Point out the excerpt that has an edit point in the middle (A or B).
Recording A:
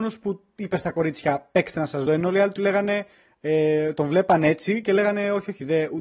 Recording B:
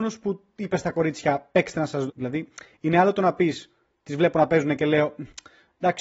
B